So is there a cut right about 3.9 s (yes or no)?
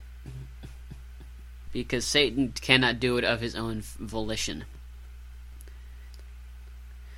no